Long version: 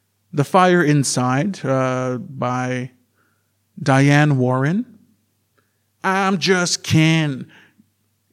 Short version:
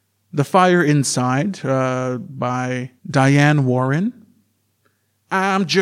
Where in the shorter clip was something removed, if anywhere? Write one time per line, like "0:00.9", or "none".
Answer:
0:03.0